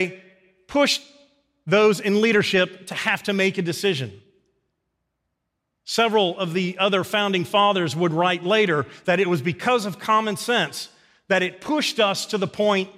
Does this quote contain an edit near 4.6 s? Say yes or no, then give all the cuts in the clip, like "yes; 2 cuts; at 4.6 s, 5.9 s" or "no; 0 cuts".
no; 0 cuts